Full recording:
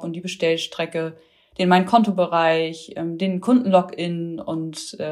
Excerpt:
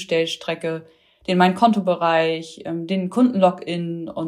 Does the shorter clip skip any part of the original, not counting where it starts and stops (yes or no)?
no